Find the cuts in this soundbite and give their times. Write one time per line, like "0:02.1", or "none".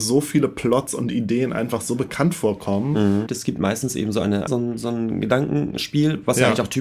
0:03.3
0:04.5